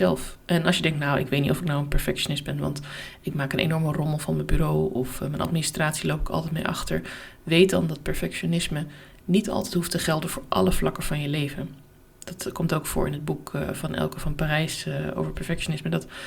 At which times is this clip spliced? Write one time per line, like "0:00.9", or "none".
none